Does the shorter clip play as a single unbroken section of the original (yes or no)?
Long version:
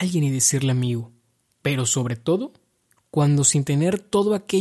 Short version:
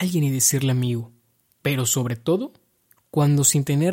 yes